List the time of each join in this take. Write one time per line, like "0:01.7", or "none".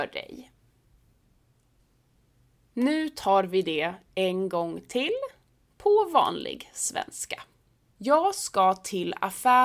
0:08.0